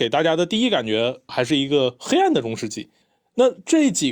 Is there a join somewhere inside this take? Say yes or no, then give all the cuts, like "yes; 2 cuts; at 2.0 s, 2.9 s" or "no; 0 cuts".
no; 0 cuts